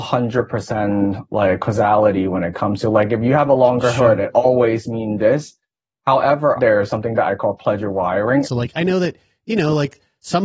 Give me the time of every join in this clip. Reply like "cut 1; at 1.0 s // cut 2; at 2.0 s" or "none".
cut 1; at 6.6 s // cut 2; at 8.4 s